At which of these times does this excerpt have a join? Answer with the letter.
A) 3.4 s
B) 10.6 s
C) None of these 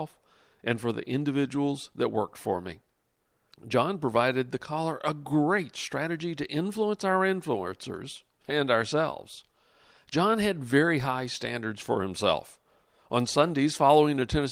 C